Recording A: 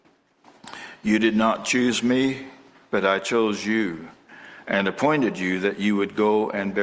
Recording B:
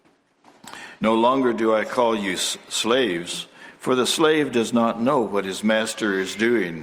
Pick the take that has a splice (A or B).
B